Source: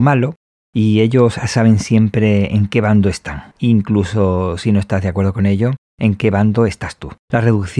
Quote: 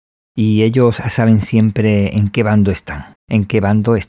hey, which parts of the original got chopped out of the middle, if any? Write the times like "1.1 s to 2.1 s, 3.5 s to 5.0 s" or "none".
3.5 s to 5.9 s